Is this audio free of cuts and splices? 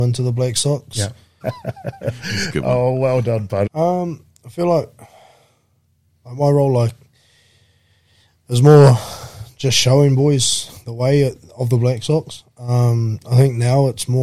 no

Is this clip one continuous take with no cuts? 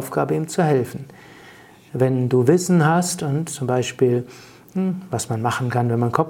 yes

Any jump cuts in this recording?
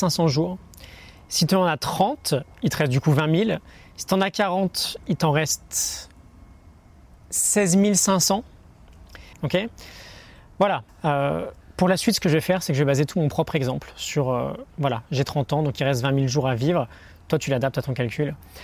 yes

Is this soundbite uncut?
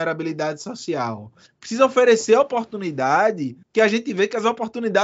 no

